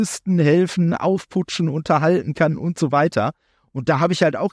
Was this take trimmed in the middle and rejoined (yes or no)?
no